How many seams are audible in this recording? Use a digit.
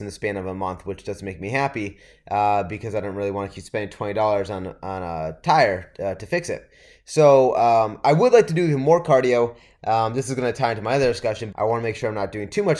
2